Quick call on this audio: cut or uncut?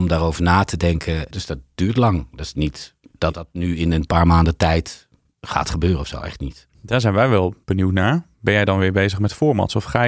cut